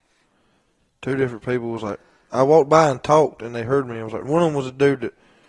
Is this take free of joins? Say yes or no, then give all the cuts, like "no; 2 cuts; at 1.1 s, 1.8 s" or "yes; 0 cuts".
no; 1 cut; at 4.2 s